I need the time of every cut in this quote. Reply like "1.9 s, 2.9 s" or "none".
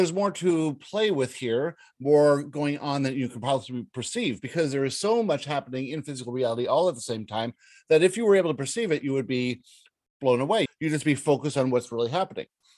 10.7 s